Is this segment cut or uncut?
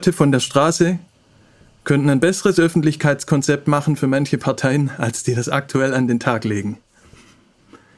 uncut